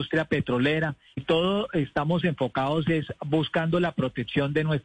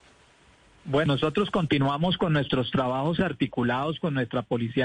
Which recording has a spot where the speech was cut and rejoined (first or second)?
first